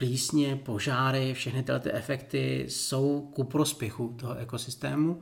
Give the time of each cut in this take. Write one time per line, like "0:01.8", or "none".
none